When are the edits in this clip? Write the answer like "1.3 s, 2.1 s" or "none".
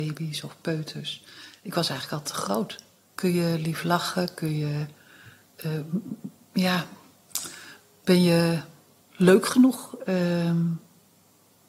3.0 s